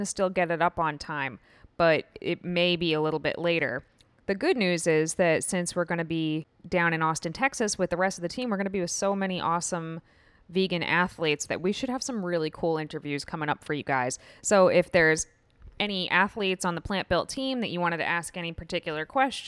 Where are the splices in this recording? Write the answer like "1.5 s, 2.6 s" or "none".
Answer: none